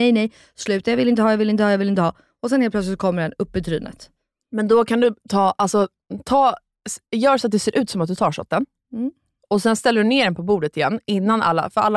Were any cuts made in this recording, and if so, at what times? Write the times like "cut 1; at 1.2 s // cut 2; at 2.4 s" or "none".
none